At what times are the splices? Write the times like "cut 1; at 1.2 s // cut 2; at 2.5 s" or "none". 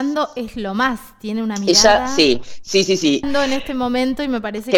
cut 1; at 3.2 s

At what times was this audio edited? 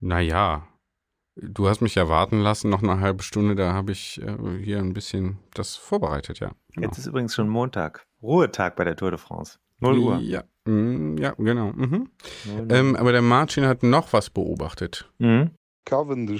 none

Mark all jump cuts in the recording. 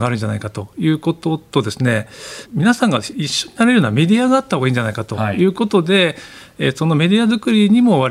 cut 1; at 2.5 s

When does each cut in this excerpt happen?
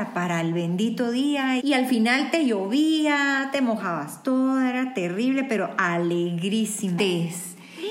cut 1; at 1.6 s // cut 2; at 7.0 s

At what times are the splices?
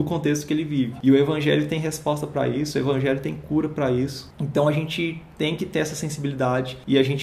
cut 1; at 4.3 s

